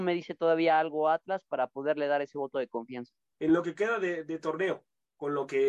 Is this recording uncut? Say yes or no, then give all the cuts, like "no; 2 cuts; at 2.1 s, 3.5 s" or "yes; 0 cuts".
no; 1 cut; at 3.3 s